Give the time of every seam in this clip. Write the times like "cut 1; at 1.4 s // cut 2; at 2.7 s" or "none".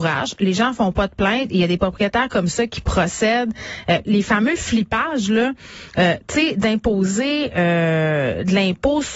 cut 1; at 4.0 s